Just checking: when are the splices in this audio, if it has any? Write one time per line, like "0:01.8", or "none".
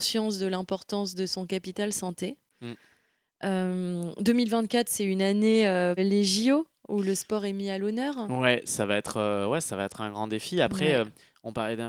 0:06.0